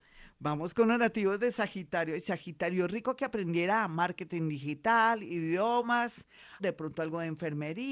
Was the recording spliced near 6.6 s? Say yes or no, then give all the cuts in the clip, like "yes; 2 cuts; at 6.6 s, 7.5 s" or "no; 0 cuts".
yes; 1 cut; at 6.6 s